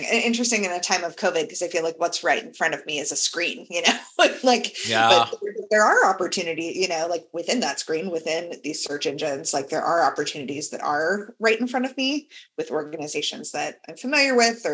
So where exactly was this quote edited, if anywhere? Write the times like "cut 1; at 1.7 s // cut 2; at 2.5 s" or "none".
none